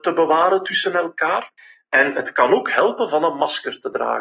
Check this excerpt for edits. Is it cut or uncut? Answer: uncut